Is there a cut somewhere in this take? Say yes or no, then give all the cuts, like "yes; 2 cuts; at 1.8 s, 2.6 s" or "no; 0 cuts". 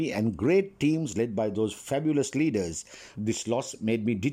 yes; 1 cut; at 3.1 s